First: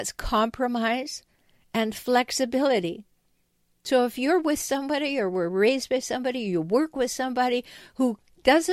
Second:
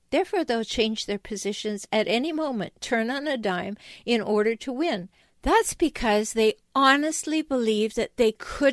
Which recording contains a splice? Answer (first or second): second